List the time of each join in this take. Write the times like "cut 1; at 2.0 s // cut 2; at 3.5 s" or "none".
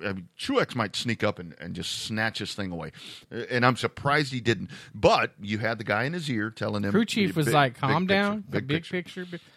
cut 1; at 3.2 s

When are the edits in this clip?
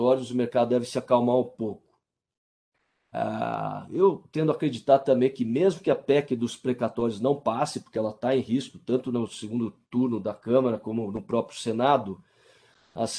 none

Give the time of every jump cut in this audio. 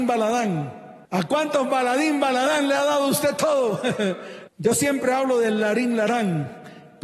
cut 1; at 1.0 s // cut 2; at 4.5 s

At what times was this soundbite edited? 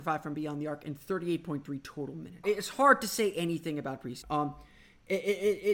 cut 1; at 2.4 s // cut 2; at 4.2 s

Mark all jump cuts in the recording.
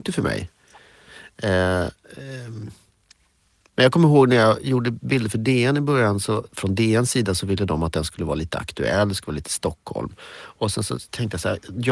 cut 1; at 6.5 s

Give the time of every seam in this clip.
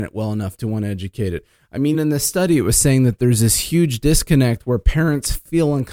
cut 1; at 1.9 s

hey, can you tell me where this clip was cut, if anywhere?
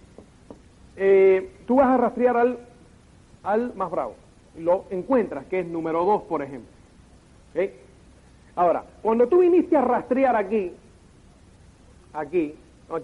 none

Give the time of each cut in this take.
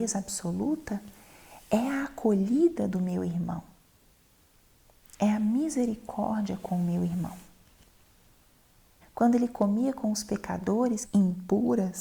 cut 1; at 9.0 s // cut 2; at 11.0 s

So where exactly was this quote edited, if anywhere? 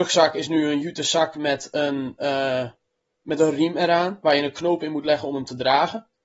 none

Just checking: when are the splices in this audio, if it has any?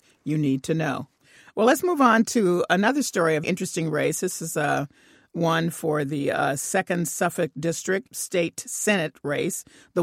cut 1; at 3.4 s

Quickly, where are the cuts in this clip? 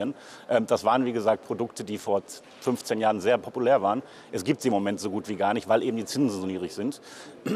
none

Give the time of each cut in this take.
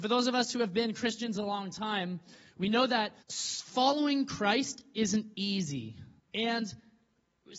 cut 1; at 3.2 s // cut 2; at 6.2 s

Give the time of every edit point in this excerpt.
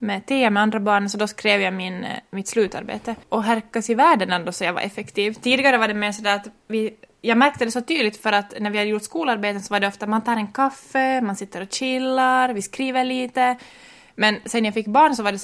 cut 1; at 3.2 s

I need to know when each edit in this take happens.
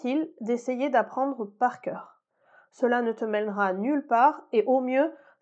none

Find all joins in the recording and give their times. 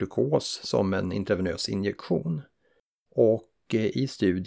cut 1; at 3.1 s

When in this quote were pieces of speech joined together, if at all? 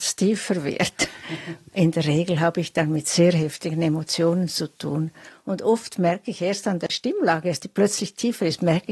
none

